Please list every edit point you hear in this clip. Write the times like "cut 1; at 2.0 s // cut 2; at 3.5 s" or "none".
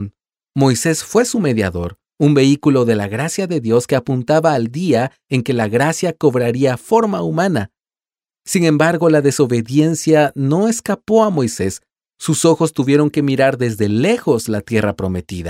none